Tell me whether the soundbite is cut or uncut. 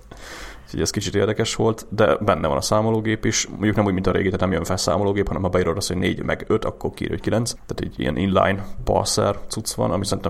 cut